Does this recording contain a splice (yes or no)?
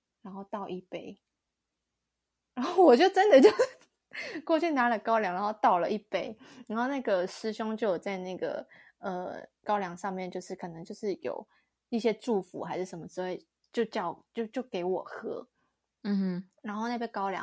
no